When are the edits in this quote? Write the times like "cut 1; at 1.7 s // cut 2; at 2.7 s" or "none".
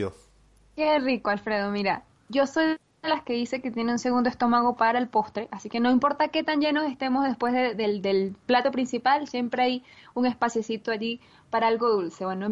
none